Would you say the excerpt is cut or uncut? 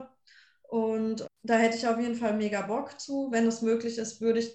cut